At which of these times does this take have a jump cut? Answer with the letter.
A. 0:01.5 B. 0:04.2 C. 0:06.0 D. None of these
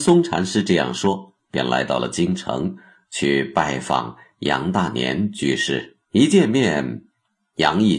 C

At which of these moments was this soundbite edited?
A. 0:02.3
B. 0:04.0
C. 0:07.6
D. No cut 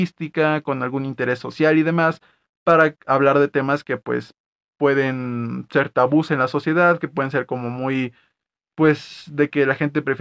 D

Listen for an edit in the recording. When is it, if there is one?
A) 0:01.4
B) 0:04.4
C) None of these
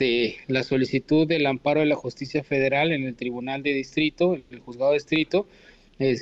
C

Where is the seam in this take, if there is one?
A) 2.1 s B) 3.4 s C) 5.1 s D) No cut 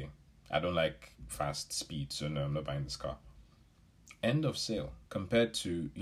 C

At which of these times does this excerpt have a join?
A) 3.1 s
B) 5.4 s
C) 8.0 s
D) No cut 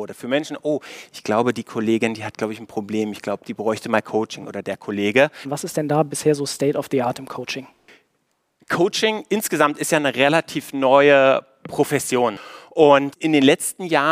B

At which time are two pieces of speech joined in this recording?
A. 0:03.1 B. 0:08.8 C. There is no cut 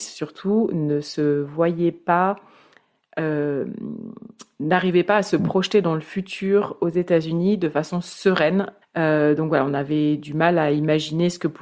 B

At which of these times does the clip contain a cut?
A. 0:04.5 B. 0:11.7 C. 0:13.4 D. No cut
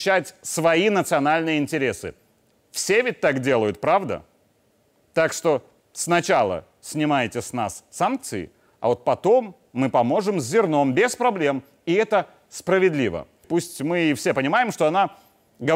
C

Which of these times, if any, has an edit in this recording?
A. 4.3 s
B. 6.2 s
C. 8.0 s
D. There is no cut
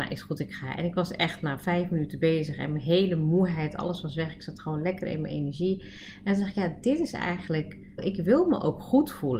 C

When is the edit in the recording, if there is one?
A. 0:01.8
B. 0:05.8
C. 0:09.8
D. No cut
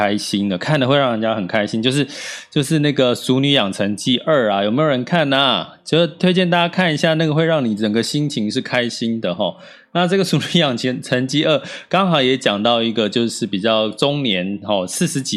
D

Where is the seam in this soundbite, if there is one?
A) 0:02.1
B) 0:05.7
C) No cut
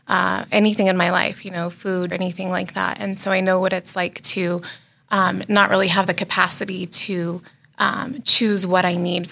A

